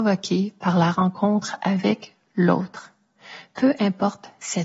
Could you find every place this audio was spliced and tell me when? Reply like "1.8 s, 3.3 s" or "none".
none